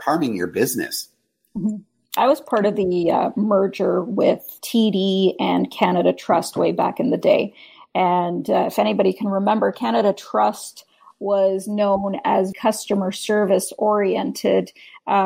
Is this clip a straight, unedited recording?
no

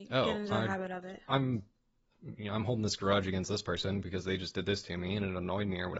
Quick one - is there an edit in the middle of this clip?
no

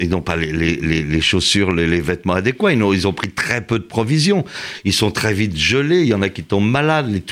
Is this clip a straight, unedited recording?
yes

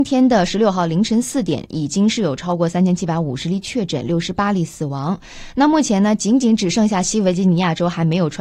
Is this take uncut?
yes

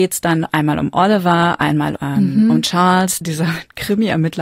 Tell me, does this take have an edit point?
yes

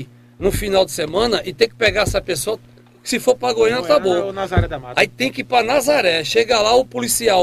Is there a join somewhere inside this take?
no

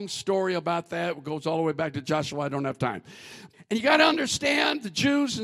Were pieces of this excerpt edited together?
yes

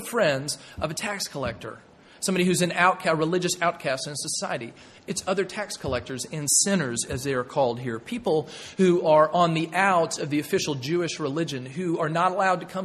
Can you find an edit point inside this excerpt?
no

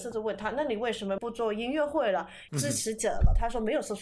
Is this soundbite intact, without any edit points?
no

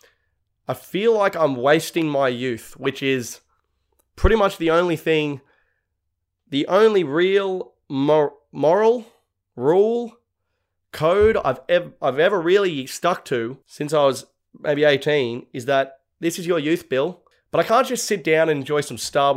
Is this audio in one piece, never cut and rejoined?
no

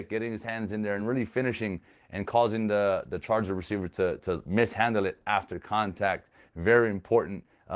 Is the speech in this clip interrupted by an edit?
no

